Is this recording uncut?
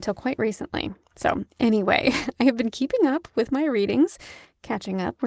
yes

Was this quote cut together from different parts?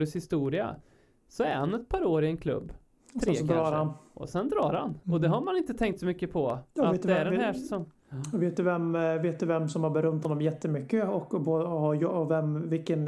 yes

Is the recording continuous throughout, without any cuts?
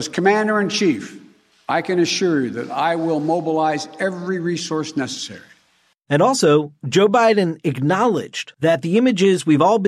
no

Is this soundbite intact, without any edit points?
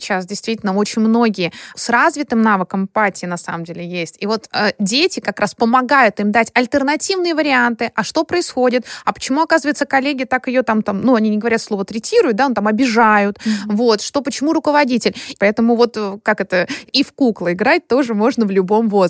no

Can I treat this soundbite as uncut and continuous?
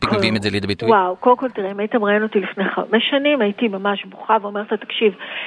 yes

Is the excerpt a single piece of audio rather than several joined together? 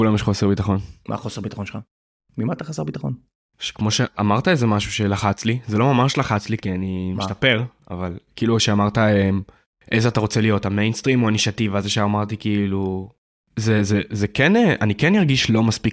yes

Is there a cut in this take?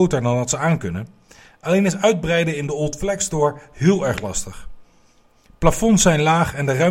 no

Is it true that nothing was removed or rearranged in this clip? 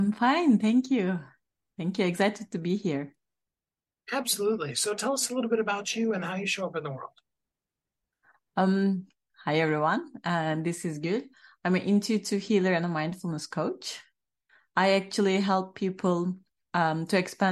yes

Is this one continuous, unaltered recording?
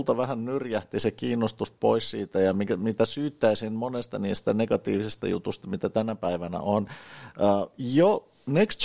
yes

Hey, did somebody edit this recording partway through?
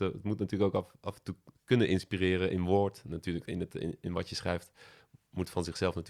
no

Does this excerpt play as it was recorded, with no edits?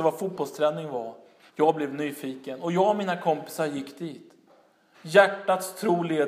no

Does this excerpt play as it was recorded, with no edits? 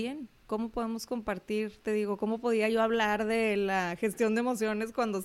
yes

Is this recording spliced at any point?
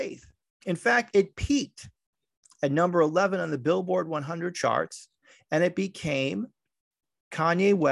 no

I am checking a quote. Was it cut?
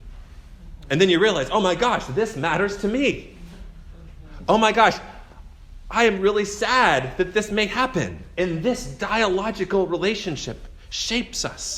yes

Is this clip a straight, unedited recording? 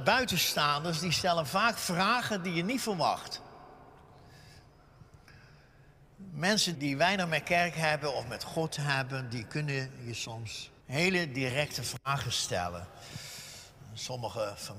no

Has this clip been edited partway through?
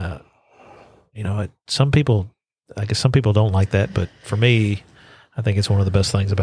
no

